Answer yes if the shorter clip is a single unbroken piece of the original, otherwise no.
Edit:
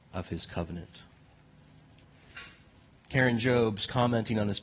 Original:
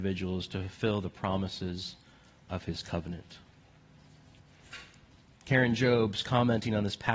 yes